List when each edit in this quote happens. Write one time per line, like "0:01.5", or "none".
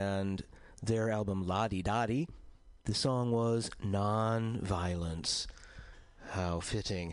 0:02.8

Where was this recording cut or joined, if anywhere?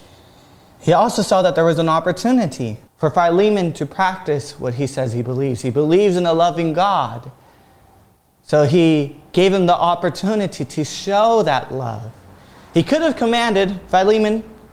0:02.9

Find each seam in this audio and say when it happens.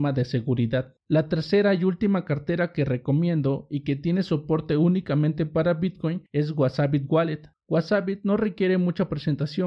0:01.0

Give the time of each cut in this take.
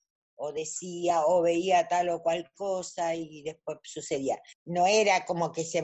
0:04.5

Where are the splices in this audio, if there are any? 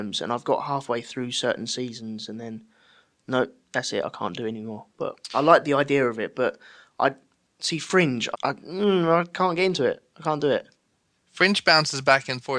0:08.3

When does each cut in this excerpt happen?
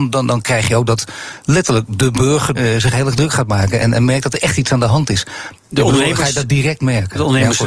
0:02.5
0:05.5

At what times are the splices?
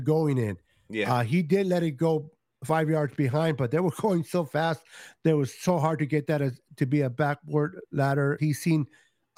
0:08.4

